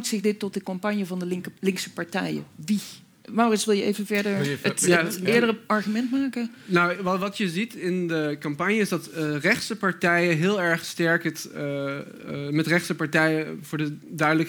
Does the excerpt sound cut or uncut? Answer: uncut